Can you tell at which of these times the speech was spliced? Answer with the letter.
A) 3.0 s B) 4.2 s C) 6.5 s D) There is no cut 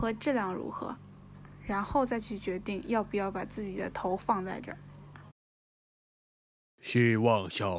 D